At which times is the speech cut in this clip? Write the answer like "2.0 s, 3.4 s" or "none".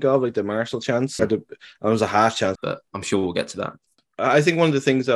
1.2 s, 2.6 s